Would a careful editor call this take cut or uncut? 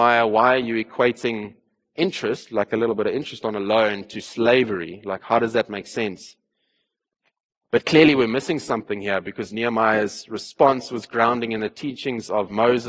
uncut